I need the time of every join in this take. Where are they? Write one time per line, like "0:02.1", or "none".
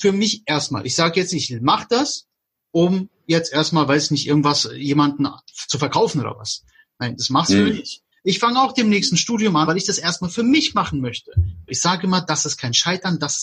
0:08.1
0:09.7
0:11.7